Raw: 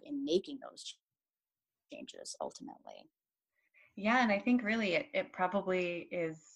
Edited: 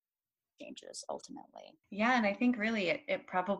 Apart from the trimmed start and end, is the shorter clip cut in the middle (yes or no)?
yes